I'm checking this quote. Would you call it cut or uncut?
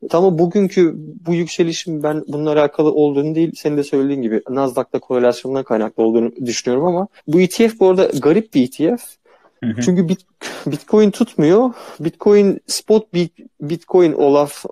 cut